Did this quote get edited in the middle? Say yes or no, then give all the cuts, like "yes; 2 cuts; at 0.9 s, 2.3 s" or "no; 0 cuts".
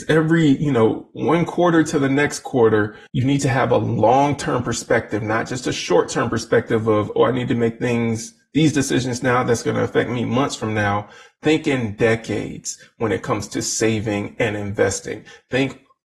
yes; 1 cut; at 3.1 s